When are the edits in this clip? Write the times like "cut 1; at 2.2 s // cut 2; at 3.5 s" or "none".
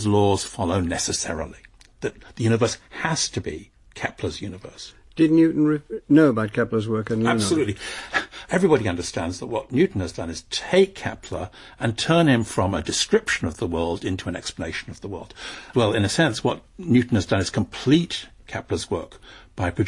cut 1; at 8.4 s // cut 2; at 15.7 s